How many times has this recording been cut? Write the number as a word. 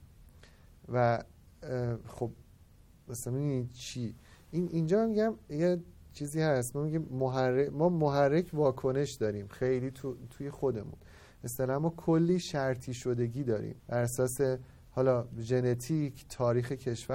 two